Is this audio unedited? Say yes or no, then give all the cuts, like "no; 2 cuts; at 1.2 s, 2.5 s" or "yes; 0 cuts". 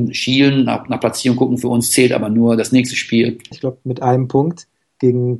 no; 1 cut; at 3.5 s